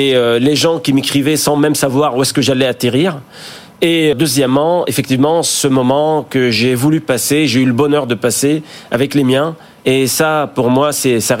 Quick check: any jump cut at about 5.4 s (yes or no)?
no